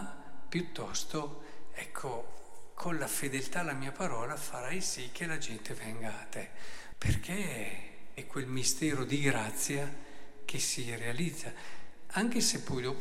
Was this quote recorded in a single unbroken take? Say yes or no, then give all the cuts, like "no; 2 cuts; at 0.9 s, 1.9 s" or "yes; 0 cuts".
no; 2 cuts; at 6.9 s, 8.2 s